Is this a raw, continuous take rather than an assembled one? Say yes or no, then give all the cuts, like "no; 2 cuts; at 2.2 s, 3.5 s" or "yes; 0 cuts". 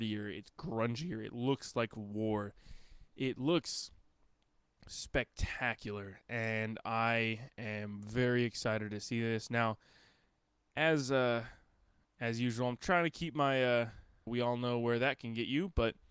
no; 1 cut; at 14.3 s